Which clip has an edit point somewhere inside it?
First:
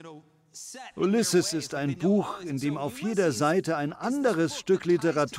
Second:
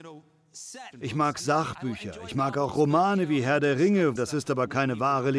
second; 2 cuts; at 0.9 s, 4.2 s

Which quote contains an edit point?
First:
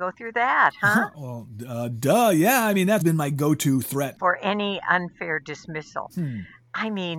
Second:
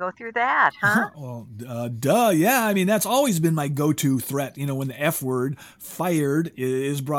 first; 2 cuts; at 3.0 s, 4.2 s

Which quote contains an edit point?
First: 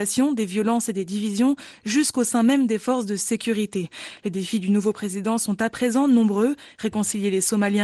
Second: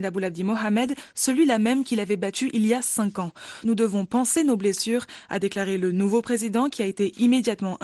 second; 1 cut; at 3.6 s

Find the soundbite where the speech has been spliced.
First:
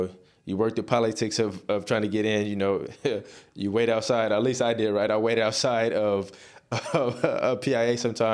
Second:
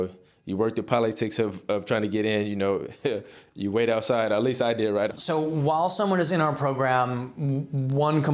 second; 1 cut; at 5.1 s

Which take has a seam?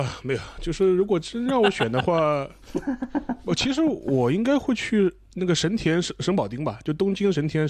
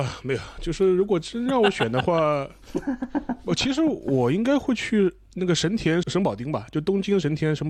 second; 1 cut; at 6.0 s

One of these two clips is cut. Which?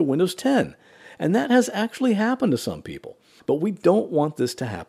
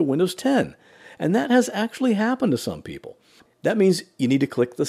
second; 1 cut; at 3.5 s

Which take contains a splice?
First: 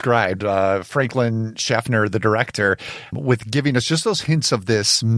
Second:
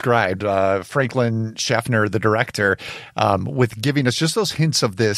first; 1 cut; at 3.1 s

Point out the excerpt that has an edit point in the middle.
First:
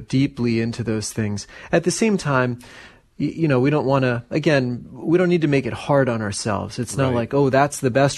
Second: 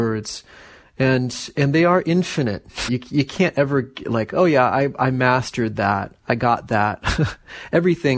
second; 1 cut; at 2.9 s

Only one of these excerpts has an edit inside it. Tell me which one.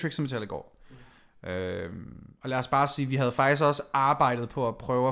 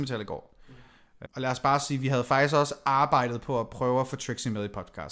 second; 1 cut; at 1.3 s

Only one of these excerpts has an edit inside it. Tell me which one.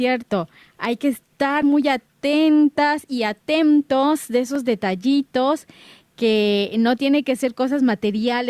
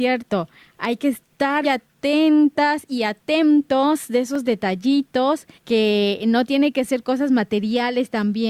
second; 2 cuts; at 1.6 s, 5.6 s

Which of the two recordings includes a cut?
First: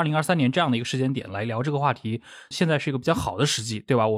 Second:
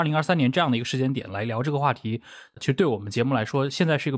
first; 1 cut; at 2.5 s

